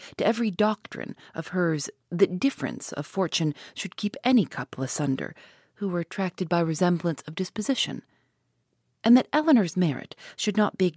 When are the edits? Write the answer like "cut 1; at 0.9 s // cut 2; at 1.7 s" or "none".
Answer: none